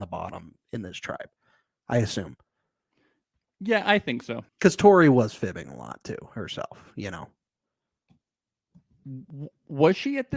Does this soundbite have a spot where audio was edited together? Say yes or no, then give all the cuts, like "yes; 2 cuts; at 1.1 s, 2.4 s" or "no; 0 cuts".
yes; 1 cut; at 4.5 s